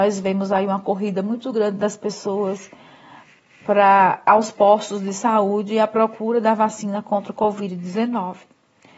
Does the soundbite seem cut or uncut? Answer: uncut